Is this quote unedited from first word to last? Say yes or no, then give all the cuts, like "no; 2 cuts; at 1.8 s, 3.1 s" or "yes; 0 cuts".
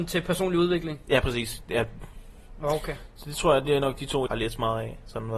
no; 1 cut; at 4.3 s